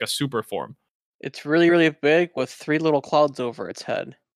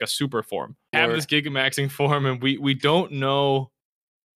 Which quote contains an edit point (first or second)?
second